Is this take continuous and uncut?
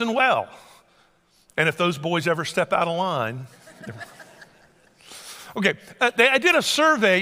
yes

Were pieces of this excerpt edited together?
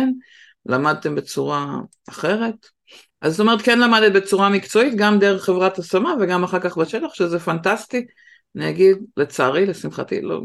yes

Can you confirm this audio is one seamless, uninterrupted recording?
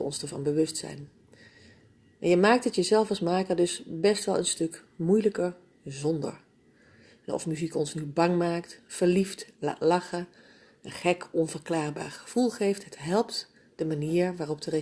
yes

